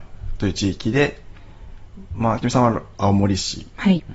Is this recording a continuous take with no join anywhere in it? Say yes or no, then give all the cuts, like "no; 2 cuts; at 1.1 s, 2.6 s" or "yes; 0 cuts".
yes; 0 cuts